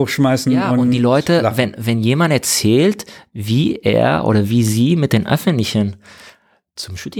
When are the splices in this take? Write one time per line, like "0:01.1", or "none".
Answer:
none